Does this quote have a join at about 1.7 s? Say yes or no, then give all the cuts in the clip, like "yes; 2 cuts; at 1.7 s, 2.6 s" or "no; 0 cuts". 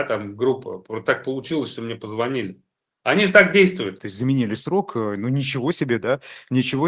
no; 2 cuts; at 2.9 s, 4.0 s